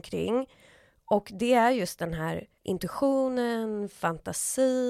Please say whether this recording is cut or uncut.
cut